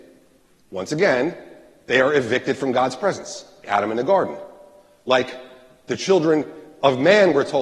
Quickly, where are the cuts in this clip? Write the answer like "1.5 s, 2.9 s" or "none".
3.6 s